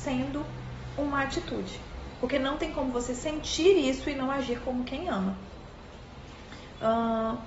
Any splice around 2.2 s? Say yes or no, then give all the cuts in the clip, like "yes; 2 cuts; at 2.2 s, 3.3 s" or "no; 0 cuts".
no; 0 cuts